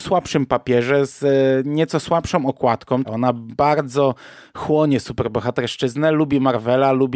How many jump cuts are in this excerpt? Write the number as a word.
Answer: one